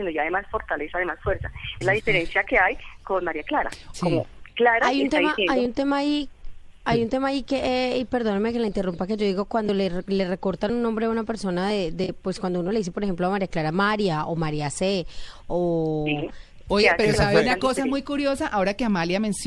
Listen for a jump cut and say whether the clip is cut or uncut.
cut